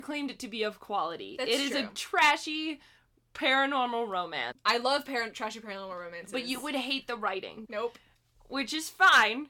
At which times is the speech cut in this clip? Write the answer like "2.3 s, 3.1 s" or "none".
4.5 s, 7.6 s